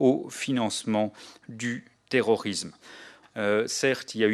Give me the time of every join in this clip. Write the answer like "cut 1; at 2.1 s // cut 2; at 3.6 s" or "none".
cut 1; at 3.2 s